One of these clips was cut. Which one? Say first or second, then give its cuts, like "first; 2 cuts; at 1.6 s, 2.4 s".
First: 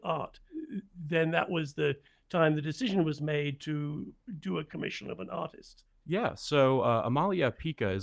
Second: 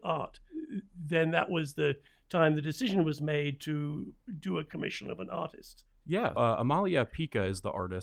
second; 1 cut; at 6.4 s